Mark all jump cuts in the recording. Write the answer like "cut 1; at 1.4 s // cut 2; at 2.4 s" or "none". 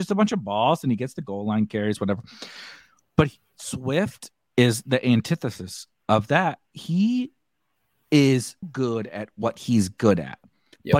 cut 1; at 8.6 s